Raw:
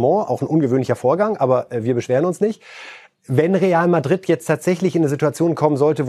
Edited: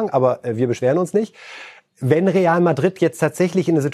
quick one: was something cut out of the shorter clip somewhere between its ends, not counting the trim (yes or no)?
no